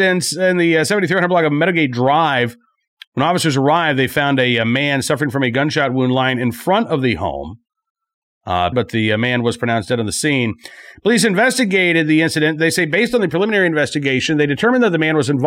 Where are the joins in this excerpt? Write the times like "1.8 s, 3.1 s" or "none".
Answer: 8.7 s